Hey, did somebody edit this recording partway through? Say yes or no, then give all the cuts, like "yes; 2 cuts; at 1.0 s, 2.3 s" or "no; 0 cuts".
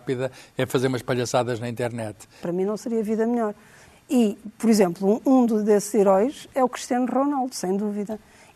yes; 1 cut; at 2.4 s